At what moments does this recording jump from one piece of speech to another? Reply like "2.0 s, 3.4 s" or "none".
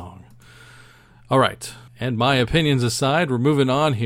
1.9 s